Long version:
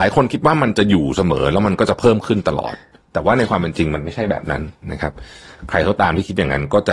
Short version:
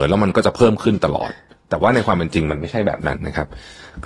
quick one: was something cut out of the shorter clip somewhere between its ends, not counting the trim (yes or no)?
yes